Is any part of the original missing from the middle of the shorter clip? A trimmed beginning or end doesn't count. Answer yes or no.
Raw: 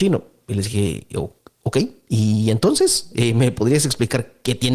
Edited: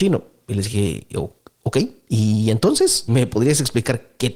yes